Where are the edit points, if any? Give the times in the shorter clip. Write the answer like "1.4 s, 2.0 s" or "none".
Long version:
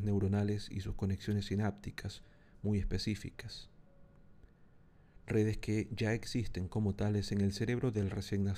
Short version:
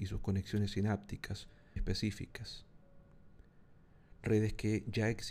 1.8 s